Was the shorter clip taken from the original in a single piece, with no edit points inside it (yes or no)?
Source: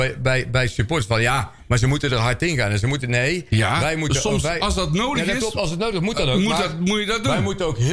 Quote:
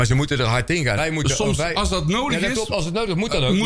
no